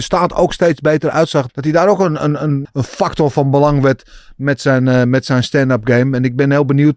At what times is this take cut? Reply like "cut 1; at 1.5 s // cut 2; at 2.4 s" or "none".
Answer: cut 1; at 1.5 s // cut 2; at 2.6 s